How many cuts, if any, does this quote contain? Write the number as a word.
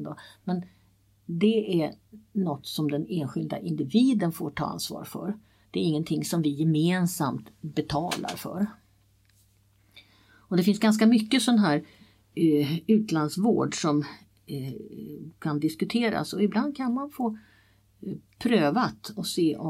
zero